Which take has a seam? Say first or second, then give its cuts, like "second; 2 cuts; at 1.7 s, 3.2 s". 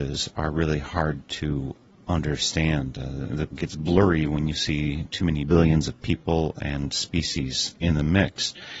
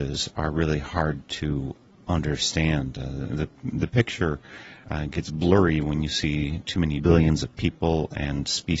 first; 1 cut; at 3.5 s